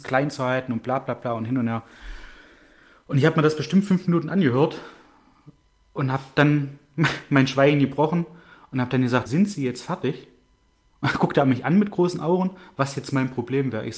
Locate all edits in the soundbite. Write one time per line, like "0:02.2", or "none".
0:09.3